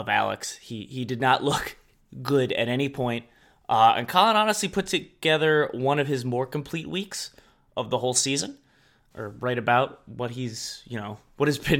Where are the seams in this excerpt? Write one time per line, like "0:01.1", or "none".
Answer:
0:09.1